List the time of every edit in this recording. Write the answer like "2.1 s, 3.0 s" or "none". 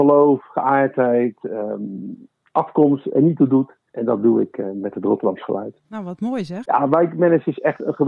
3.9 s, 6.6 s